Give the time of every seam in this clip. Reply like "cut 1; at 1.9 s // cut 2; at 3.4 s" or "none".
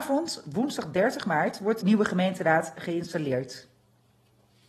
cut 1; at 1.8 s